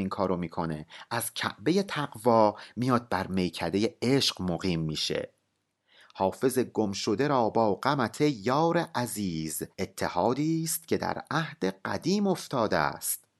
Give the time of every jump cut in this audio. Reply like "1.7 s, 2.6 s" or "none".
9.7 s